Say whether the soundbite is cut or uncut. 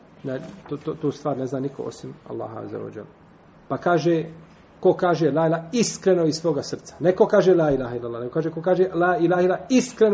uncut